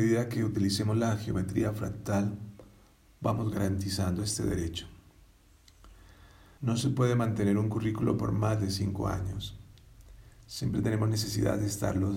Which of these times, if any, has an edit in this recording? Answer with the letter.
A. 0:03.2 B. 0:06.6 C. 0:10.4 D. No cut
B